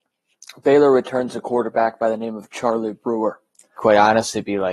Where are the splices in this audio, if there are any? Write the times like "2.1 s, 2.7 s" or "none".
3.8 s